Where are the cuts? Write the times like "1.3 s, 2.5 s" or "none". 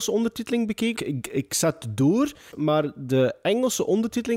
0.9 s, 2.5 s